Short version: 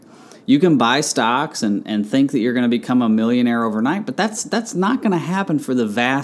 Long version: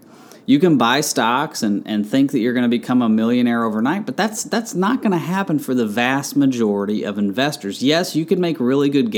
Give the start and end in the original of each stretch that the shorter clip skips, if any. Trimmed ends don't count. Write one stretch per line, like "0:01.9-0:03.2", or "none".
none

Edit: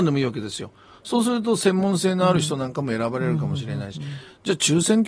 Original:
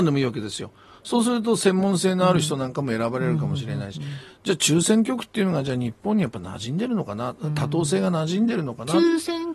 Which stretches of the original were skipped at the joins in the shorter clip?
none

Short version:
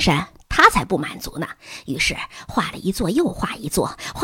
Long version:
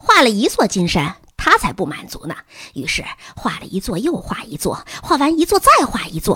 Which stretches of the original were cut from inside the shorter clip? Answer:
none

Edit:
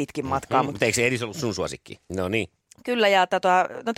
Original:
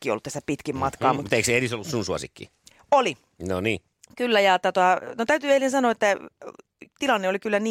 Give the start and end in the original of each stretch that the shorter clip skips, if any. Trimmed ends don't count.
0:02.6-0:03.4

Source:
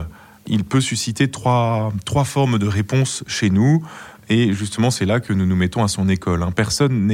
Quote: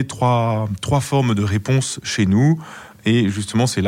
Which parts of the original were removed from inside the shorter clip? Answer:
none

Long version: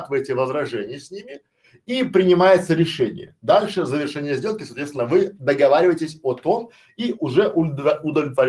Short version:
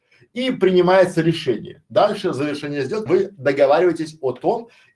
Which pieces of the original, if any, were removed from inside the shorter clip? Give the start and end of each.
0:04.6-0:05.1

